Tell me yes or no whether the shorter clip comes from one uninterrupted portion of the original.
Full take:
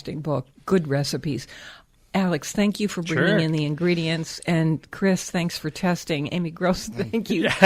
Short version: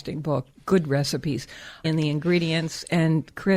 no